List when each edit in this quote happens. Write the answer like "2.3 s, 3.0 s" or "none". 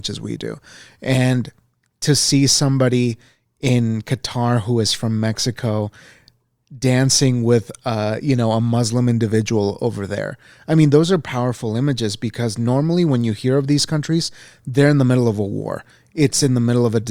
none